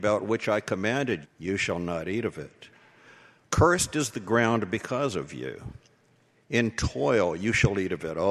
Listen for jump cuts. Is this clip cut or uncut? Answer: cut